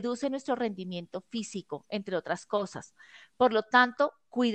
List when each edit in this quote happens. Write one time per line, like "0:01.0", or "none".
none